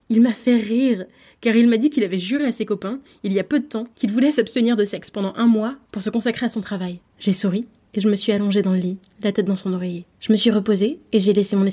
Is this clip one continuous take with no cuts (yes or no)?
no